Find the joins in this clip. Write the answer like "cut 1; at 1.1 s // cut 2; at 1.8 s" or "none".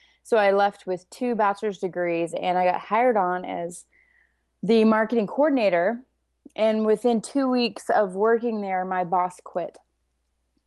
cut 1; at 2.3 s